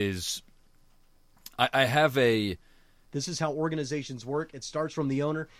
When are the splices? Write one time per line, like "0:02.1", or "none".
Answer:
0:03.0